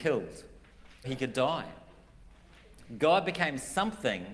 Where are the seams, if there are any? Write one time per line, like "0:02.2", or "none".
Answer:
0:01.0

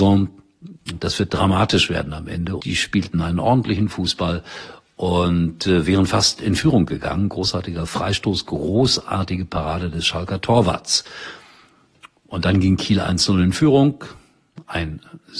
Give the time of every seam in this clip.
0:02.6

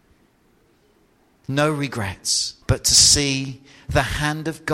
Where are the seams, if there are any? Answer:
0:02.6

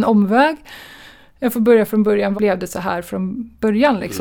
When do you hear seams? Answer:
0:02.3

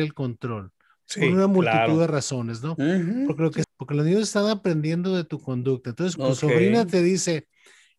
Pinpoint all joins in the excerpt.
0:03.6
0:06.2

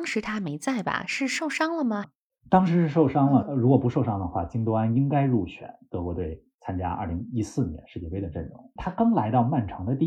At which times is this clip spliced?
0:02.0
0:08.8

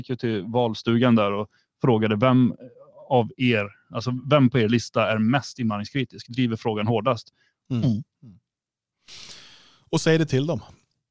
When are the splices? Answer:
0:07.6

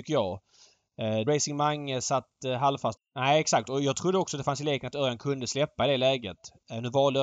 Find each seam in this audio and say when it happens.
0:01.3
0:03.0

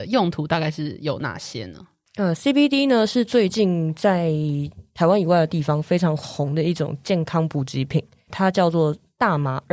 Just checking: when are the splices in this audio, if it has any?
none

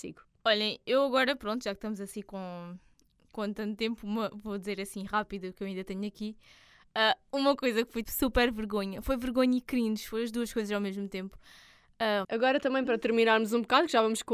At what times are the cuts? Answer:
0:08.0
0:12.2

